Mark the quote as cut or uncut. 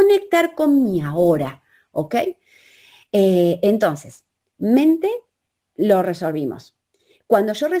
uncut